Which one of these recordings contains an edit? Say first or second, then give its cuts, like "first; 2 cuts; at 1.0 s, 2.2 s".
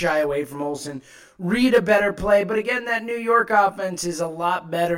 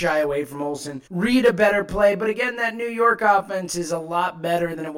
second; 1 cut; at 1.1 s